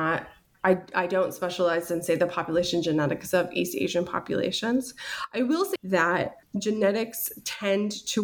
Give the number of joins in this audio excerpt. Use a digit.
1